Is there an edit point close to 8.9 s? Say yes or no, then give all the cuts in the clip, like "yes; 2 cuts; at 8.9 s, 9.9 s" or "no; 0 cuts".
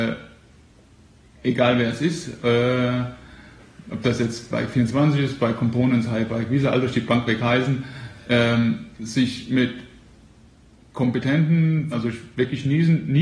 yes; 2 cuts; at 8.9 s, 11.9 s